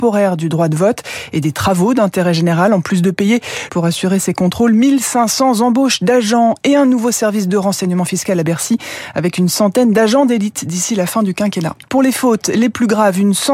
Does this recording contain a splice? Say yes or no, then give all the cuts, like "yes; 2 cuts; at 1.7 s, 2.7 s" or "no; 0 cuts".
yes; 2 cuts; at 3.7 s, 11.9 s